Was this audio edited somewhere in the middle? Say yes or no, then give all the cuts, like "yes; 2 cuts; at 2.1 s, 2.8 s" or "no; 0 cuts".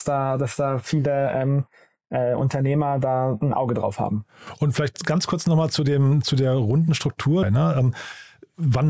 yes; 1 cut; at 7.4 s